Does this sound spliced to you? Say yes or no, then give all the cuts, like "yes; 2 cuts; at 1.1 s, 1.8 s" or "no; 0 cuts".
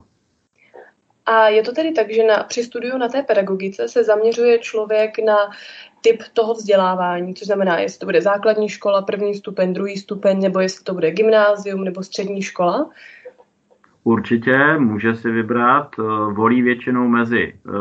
no; 0 cuts